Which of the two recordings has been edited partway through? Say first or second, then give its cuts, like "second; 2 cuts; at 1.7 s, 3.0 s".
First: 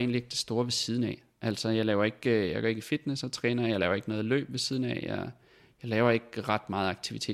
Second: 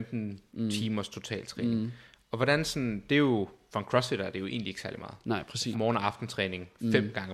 second; 1 cut; at 5.7 s